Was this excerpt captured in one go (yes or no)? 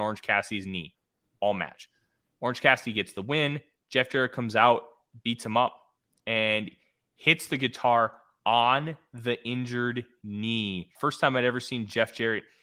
no